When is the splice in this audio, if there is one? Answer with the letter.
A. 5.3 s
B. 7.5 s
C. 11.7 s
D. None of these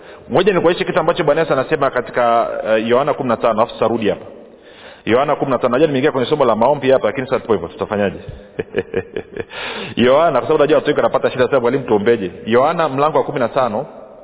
B